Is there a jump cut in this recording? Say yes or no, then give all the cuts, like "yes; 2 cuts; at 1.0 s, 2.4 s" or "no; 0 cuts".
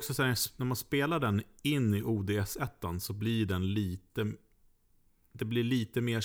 no; 0 cuts